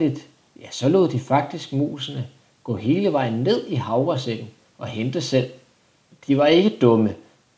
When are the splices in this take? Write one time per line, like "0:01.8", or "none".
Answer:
0:06.1